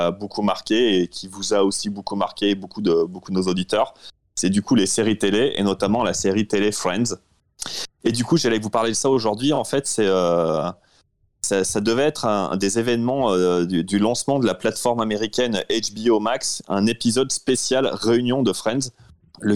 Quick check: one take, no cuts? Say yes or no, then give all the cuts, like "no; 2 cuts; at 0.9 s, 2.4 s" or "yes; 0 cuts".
yes; 0 cuts